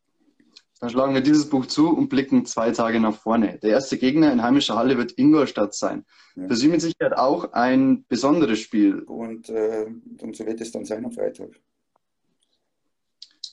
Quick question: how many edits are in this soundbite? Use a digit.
2